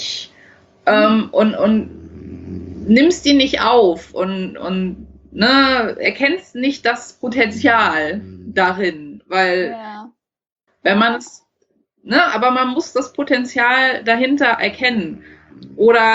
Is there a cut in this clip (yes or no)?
yes